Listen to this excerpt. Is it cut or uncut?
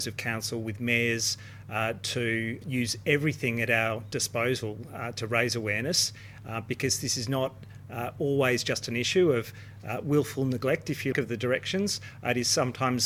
cut